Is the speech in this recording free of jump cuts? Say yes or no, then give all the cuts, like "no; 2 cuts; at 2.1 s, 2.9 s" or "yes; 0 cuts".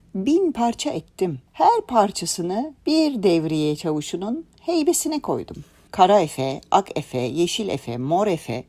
no; 3 cuts; at 1.5 s, 2.8 s, 5.9 s